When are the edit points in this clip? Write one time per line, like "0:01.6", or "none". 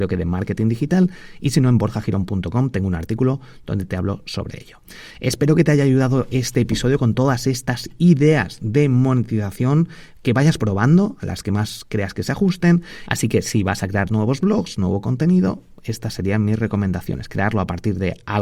0:13.1